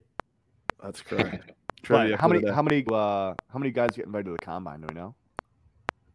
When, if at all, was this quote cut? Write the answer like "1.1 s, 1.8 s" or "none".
2.9 s